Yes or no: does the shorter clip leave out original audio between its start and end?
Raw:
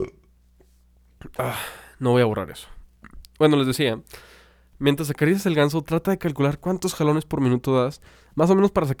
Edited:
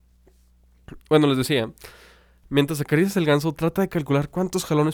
yes